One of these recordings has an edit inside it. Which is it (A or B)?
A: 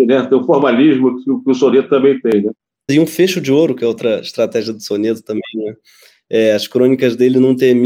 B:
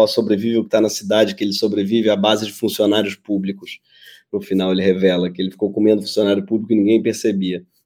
A